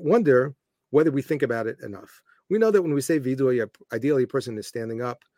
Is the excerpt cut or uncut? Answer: uncut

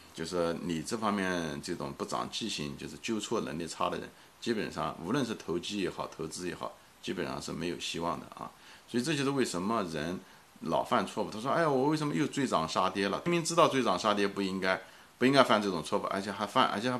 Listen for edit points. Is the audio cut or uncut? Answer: cut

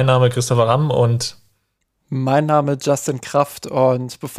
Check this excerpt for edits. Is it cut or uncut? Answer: uncut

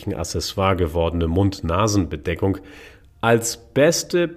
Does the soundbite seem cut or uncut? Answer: uncut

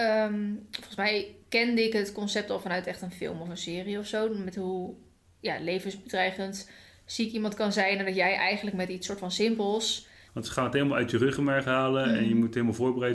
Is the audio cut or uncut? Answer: cut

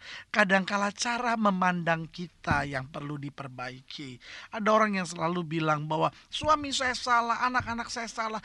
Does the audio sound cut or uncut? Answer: uncut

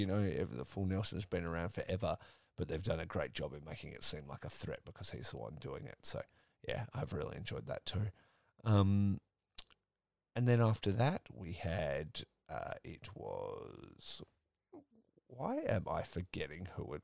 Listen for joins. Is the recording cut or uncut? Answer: uncut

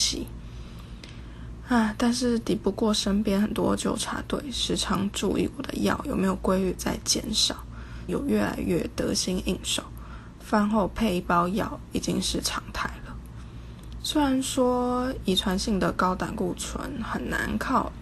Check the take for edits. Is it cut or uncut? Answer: cut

